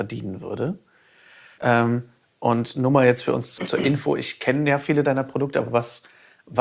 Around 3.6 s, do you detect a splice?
yes; 2 cuts; at 1.6 s, 3.6 s

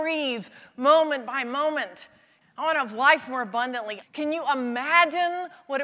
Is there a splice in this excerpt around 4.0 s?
yes; 2 cuts; at 2.4 s, 4.0 s

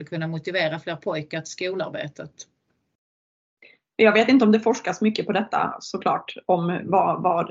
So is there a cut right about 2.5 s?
no; 0 cuts

